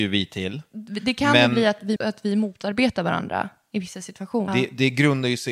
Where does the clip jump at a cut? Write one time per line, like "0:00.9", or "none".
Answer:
0:02.0
0:04.5